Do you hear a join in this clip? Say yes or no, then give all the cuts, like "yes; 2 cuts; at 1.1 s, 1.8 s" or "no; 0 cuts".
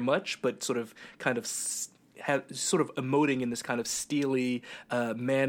no; 0 cuts